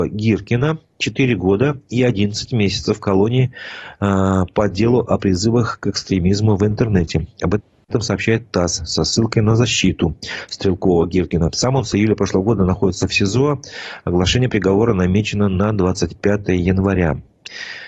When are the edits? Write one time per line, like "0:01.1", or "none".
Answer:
none